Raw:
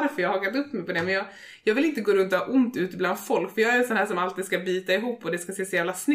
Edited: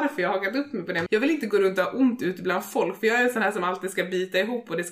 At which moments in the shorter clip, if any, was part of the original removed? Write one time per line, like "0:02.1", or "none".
0:01.1